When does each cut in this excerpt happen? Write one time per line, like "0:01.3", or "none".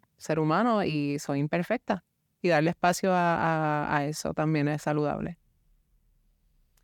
none